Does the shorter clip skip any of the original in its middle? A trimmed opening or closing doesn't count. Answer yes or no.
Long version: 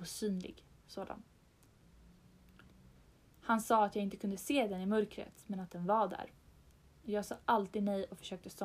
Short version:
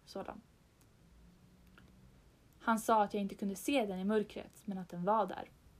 no